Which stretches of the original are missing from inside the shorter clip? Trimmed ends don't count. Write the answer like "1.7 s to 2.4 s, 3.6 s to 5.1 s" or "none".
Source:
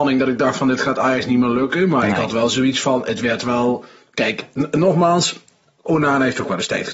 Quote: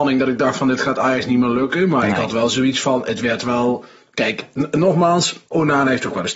5.5 s to 5.8 s